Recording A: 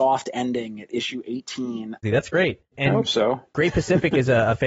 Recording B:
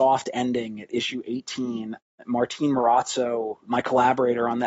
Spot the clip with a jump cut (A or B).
A